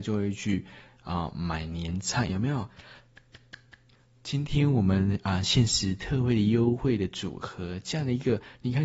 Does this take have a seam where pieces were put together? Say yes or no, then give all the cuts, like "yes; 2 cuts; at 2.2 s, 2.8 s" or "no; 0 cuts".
yes; 1 cut; at 2.3 s